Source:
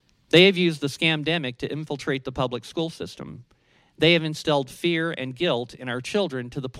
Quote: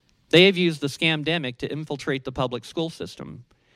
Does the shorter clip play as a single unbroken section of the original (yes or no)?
yes